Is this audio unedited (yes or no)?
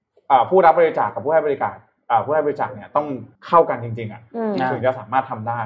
no